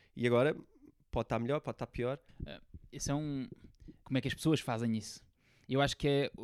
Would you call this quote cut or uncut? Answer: cut